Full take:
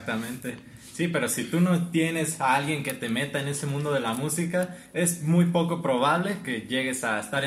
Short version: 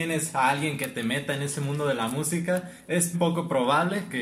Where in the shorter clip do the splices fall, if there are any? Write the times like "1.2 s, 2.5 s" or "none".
3.1 s